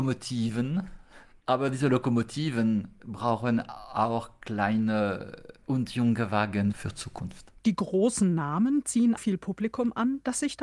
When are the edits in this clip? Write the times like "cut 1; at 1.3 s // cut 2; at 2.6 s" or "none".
cut 1; at 7.6 s // cut 2; at 9.2 s